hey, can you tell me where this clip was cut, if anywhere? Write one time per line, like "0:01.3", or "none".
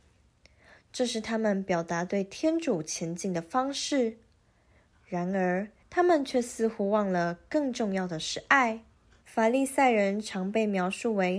0:05.8
0:09.2